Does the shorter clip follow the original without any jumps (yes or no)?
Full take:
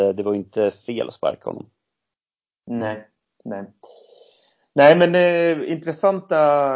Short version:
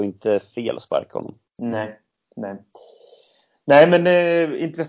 no